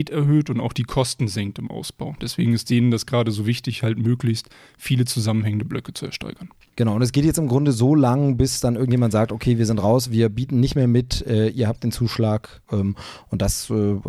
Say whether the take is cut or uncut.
uncut